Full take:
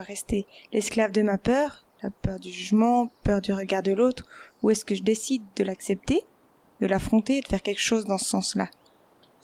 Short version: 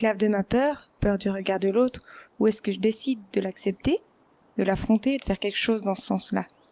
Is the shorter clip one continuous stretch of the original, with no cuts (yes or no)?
no